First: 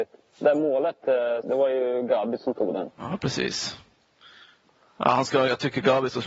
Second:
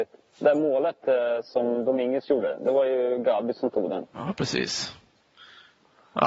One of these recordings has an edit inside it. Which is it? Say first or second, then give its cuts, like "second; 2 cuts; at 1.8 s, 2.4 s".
first; 1 cut; at 1.4 s